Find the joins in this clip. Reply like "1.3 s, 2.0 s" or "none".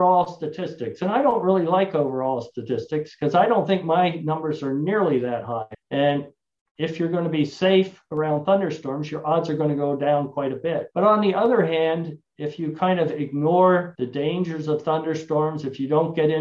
5.7 s, 10.9 s